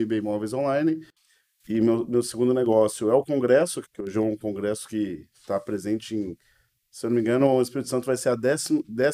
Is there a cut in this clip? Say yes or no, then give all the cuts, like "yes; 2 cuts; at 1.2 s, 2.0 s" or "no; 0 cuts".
yes; 1 cut; at 3.8 s